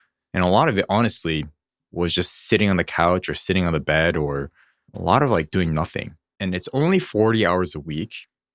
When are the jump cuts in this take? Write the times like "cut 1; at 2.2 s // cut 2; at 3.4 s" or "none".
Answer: cut 1; at 1.8 s // cut 2; at 6.4 s